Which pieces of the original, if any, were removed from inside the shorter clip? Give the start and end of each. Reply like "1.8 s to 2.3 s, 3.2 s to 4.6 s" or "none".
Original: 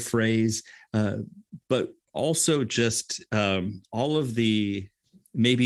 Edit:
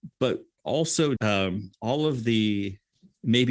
2.7 s to 3.3 s